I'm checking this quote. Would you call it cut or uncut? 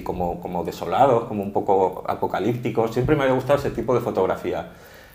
uncut